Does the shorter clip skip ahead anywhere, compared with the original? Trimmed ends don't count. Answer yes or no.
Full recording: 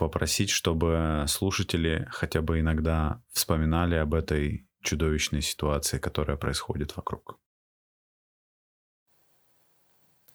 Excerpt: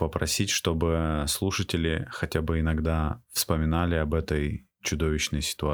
no